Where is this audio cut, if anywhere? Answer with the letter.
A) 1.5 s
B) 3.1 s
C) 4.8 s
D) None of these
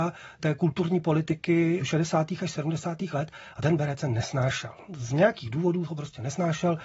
D